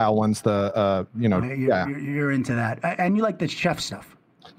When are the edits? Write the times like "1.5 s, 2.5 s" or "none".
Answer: 1.4 s